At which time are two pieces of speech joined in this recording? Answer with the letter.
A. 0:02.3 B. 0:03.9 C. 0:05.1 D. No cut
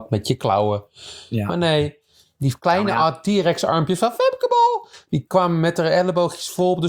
D